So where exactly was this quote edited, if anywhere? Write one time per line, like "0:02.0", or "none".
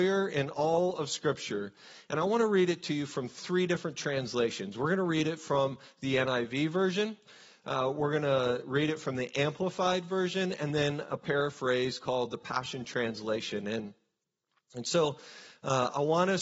none

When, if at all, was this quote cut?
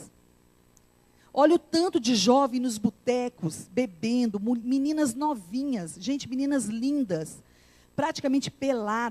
none

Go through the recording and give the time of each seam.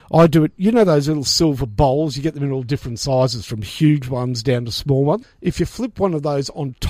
0:05.2

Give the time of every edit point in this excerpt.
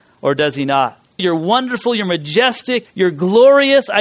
0:01.2
0:02.9

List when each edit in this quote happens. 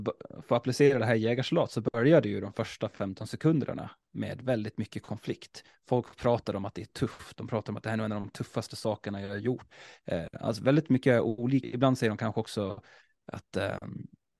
0:11.6

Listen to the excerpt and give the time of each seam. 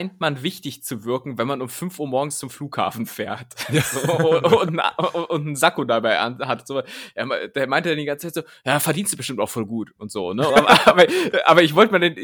0:10.5

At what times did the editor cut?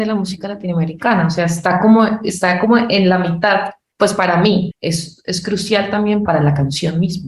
0:04.7
0:06.3

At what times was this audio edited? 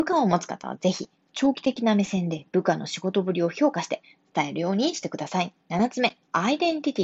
0:05.6

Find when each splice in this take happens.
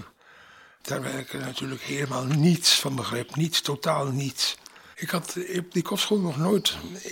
0:04.9

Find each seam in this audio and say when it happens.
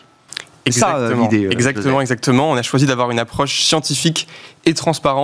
none

